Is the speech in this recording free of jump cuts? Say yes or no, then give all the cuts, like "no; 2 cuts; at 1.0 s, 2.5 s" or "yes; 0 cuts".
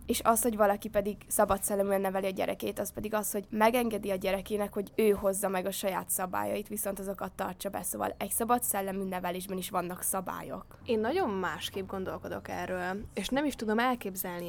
yes; 0 cuts